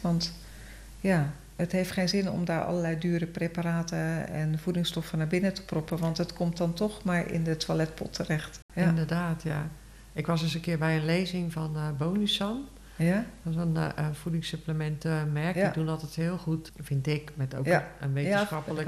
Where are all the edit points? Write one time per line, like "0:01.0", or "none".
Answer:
none